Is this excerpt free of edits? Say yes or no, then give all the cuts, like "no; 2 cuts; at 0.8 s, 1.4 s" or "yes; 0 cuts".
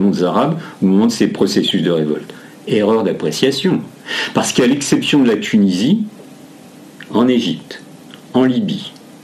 yes; 0 cuts